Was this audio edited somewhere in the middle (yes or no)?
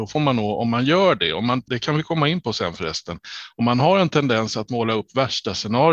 yes